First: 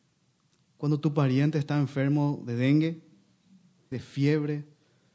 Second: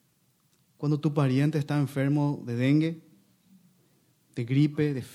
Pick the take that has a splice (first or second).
first